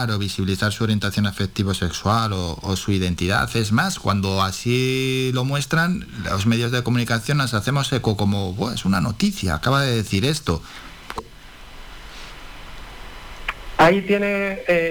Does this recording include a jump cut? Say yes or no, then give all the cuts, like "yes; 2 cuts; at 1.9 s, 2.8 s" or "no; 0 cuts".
yes; 1 cut; at 11.2 s